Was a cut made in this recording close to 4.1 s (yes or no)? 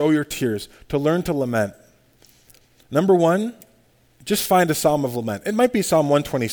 no